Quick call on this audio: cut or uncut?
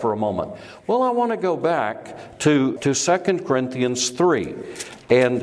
cut